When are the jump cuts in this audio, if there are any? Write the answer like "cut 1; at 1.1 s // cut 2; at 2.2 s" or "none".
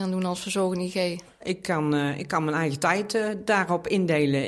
cut 1; at 1.4 s

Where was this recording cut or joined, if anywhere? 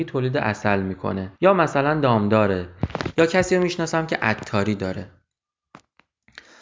cut 1; at 1.4 s

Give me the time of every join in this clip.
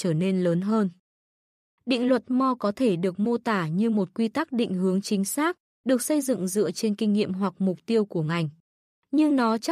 cut 1; at 1.7 s

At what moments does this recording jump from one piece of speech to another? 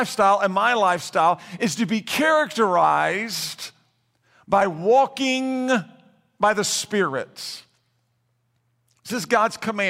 none

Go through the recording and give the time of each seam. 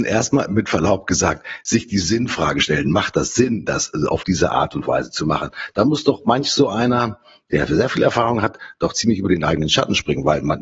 none

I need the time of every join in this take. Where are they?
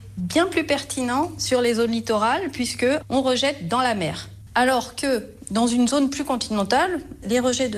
cut 1; at 4.5 s

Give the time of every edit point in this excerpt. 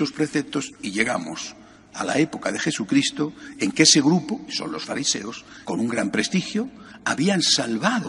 cut 1; at 5.6 s

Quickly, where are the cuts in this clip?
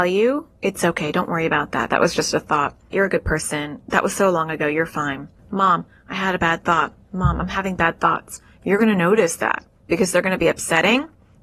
cut 1; at 2.9 s // cut 2; at 5.4 s

